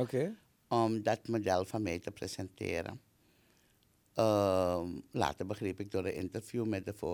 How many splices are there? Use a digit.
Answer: 0